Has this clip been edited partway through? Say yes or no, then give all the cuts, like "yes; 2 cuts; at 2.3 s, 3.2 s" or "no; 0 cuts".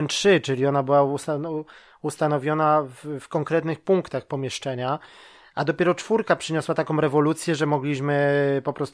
no; 0 cuts